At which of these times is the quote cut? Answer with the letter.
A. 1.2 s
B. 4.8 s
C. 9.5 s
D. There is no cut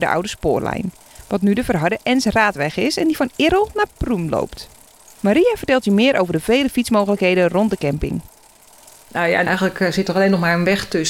C